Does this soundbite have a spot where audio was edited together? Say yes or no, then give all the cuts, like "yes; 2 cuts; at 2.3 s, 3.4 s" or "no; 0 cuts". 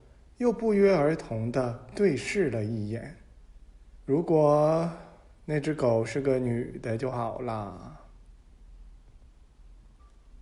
yes; 1 cut; at 4.0 s